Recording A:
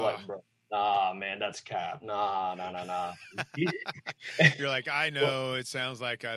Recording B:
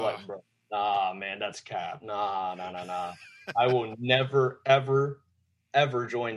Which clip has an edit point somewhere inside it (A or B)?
A